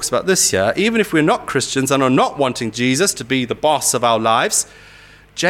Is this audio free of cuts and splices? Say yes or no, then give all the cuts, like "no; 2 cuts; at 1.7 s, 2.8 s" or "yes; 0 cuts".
yes; 0 cuts